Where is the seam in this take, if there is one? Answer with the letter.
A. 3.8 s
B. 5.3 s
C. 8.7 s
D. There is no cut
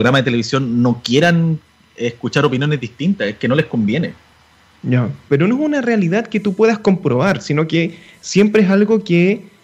B